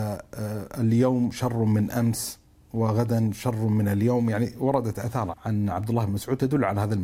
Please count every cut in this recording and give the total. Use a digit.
1